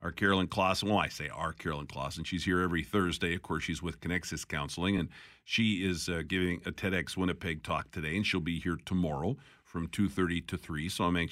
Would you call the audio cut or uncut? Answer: uncut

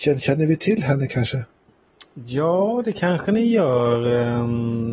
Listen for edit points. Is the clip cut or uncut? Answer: uncut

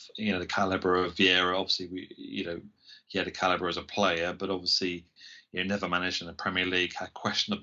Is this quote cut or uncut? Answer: uncut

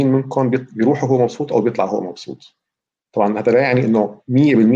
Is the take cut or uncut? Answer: uncut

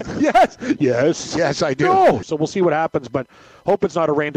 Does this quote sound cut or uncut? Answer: cut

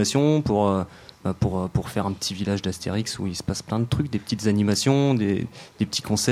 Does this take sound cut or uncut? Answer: uncut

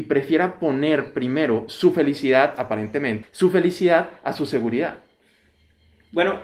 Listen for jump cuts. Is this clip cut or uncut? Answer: cut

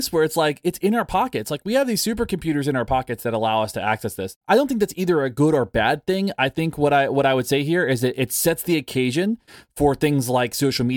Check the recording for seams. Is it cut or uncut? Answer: uncut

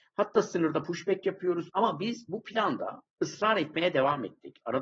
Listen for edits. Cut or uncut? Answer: cut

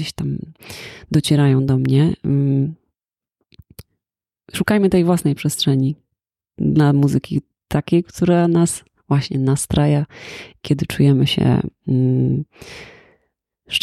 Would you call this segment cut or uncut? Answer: uncut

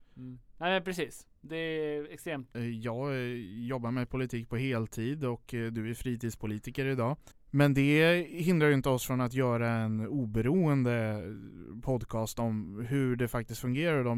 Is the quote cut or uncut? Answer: cut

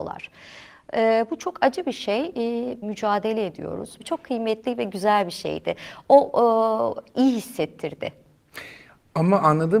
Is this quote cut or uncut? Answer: cut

